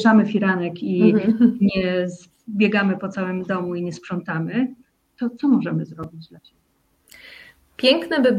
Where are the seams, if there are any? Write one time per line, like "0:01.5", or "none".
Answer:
none